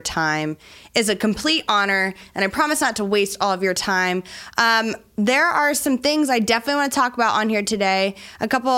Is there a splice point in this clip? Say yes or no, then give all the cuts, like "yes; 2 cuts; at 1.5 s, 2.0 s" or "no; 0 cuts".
no; 0 cuts